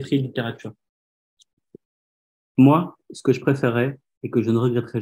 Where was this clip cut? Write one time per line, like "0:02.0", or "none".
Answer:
none

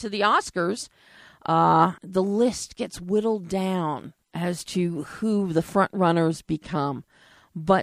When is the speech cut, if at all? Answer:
0:02.0
0:04.2

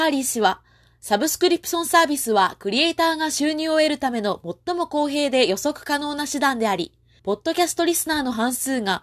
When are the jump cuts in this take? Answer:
0:07.2

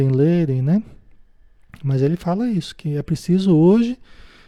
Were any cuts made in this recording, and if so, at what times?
none

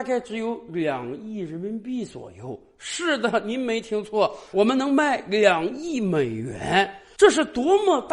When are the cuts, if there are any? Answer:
0:04.5

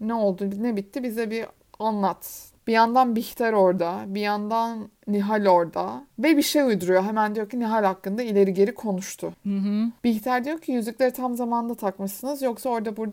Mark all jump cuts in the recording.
0:02.6

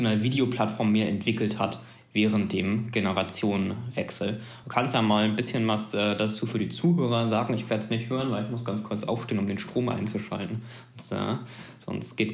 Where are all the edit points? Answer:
none

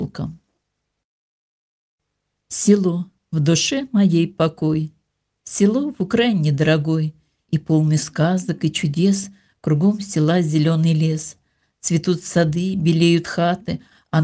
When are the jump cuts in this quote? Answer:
none

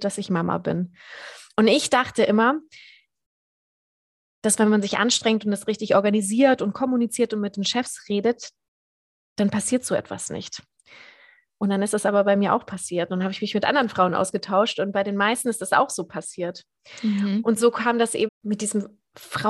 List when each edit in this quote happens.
0:18.3

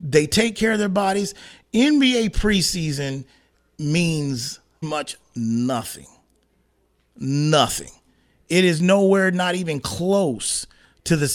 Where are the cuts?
0:04.8

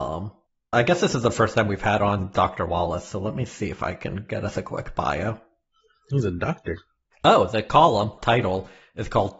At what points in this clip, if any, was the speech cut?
0:08.2

